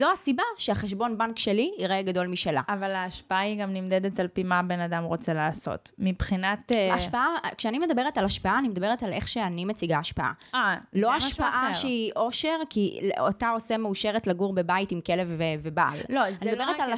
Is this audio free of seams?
yes; 0 cuts

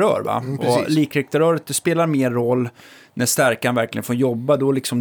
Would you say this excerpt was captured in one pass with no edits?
yes; 0 cuts

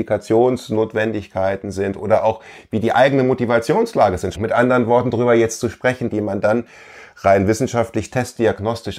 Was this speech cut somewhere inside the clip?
yes; 2 cuts; at 4.3 s, 6.1 s

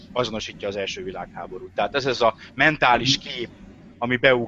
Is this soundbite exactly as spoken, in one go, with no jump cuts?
yes; 0 cuts

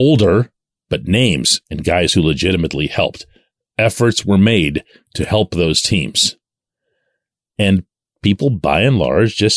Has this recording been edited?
no; 0 cuts

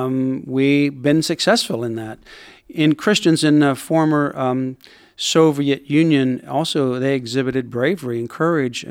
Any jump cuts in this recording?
no; 0 cuts

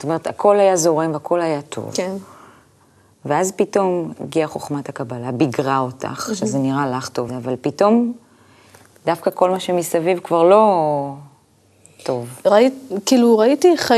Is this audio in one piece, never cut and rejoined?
no; 1 cut; at 7.3 s

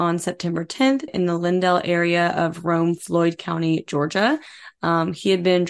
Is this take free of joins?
no; 1 cut; at 1.1 s

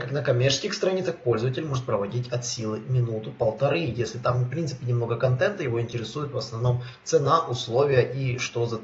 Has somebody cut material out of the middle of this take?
no; 0 cuts

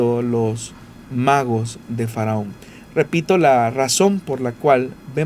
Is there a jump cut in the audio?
no; 0 cuts

